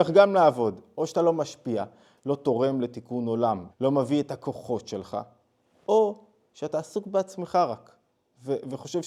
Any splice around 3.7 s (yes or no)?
yes